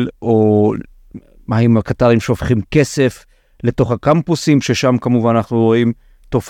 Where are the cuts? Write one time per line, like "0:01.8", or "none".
none